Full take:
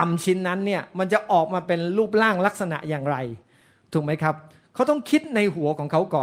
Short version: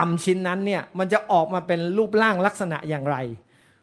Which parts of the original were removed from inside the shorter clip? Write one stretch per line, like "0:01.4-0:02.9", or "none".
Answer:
none